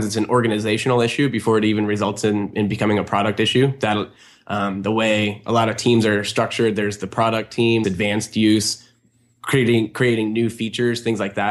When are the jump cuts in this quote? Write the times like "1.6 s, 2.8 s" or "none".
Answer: 7.8 s